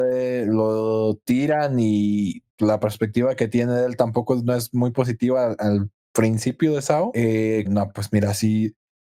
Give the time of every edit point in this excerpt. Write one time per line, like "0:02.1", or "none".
0:02.5
0:07.6